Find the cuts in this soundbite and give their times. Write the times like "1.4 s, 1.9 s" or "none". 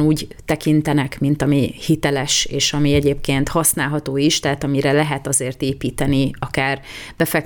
none